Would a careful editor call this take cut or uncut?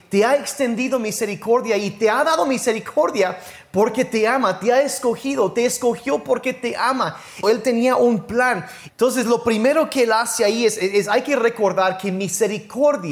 cut